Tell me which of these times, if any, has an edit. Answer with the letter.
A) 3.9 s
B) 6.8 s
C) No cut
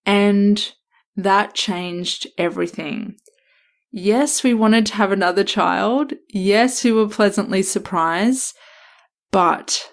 C